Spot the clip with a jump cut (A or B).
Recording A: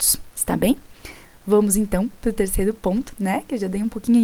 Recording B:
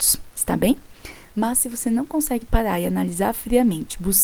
B